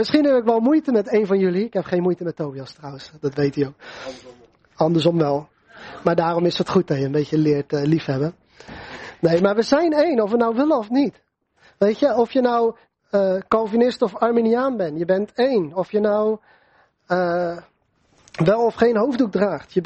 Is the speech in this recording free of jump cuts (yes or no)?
yes